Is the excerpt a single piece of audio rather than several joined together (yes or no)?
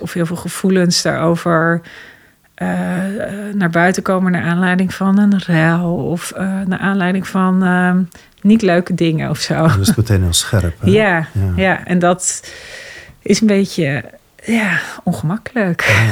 yes